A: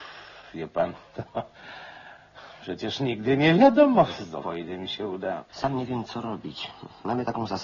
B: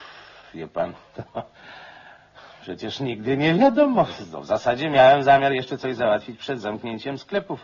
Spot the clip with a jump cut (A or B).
A